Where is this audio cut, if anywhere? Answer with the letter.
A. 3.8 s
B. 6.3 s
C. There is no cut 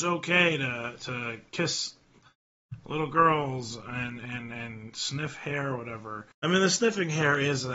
B